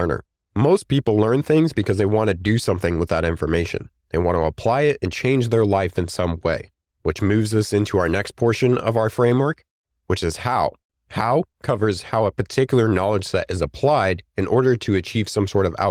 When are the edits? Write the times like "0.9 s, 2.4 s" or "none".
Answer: none